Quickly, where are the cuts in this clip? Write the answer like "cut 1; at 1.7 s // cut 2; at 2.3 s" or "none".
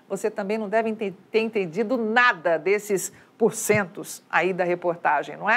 none

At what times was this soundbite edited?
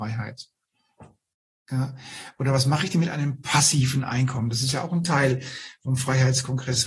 none

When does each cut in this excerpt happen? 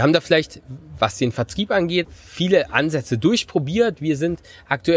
cut 1; at 2.0 s

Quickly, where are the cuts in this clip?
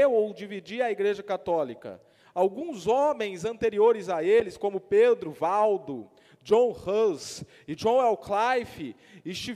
cut 1; at 2.2 s

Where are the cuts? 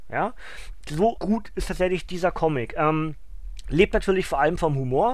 cut 1; at 1.2 s

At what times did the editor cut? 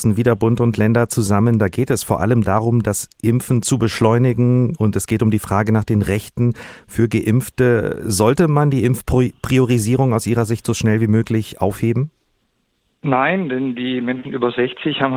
none

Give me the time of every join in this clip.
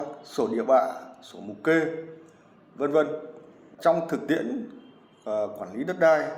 cut 1; at 3.8 s

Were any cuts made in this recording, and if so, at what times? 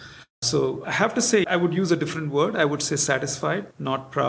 cut 1; at 1.4 s

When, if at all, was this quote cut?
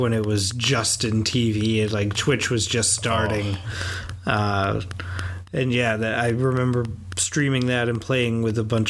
none

